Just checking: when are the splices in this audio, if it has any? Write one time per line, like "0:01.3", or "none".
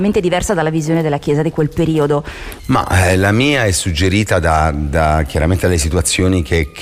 0:02.6